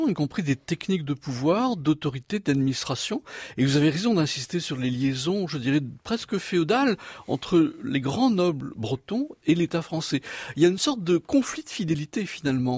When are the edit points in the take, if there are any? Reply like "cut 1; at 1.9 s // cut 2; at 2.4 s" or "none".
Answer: none